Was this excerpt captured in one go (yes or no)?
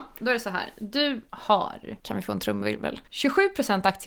no